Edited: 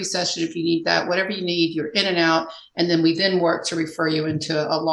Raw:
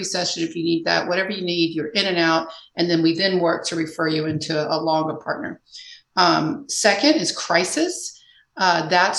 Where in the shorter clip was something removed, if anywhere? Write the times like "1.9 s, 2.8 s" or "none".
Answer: none